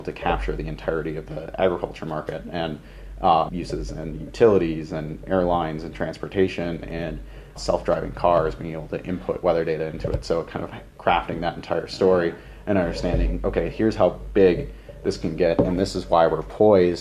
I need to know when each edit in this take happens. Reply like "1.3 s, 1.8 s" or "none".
3.5 s, 7.6 s